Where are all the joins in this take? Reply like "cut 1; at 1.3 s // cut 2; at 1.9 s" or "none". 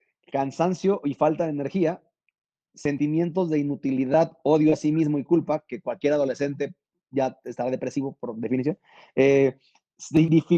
none